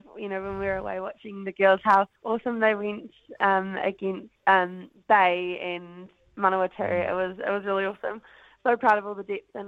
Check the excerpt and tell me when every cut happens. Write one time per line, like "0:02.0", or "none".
0:02.2
0:04.4